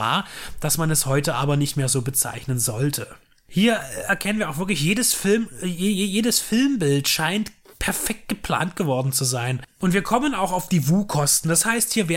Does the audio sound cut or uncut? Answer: cut